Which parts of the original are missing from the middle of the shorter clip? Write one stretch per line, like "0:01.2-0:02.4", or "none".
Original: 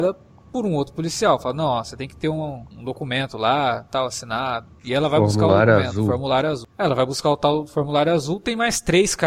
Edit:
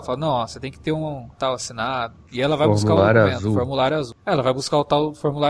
0:02.7-0:03.8